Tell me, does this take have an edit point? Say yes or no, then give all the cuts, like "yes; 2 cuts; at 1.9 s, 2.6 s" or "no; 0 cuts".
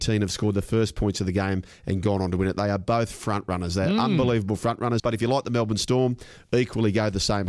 yes; 1 cut; at 5.0 s